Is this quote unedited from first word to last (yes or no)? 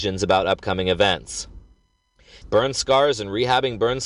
no